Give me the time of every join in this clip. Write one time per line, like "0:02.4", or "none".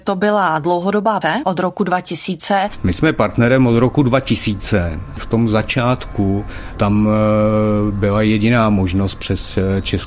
0:01.2